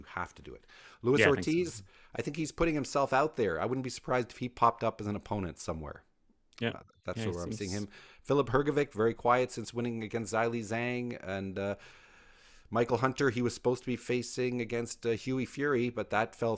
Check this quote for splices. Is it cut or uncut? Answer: uncut